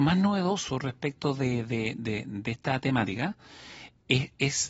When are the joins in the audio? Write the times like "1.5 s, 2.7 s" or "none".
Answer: none